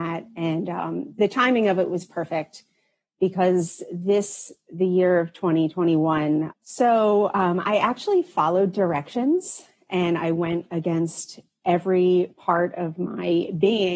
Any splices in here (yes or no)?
yes